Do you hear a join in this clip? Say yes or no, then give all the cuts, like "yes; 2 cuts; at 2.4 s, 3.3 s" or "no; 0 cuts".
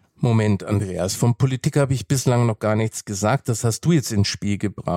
no; 0 cuts